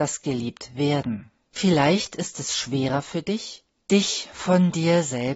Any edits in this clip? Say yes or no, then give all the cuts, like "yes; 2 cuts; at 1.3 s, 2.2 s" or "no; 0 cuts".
no; 0 cuts